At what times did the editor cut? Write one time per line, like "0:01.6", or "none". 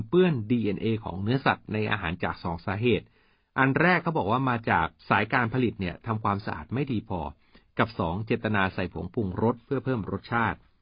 0:02.2
0:05.0